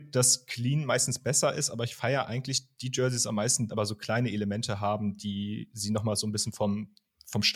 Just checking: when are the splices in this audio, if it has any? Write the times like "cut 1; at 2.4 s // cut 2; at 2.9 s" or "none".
cut 1; at 3.7 s